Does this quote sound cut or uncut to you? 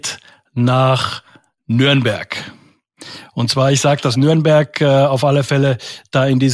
uncut